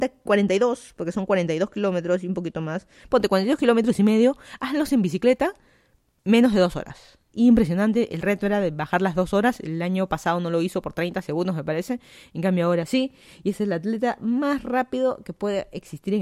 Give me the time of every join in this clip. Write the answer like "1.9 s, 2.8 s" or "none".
7.3 s